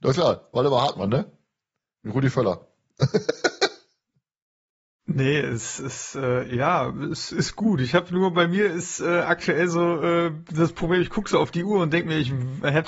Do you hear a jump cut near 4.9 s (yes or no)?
no